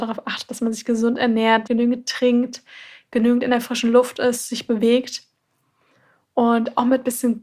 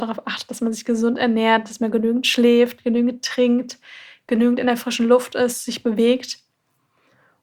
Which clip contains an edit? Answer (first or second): first